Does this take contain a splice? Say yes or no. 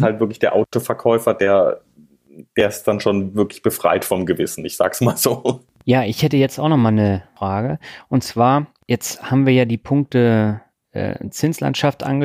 no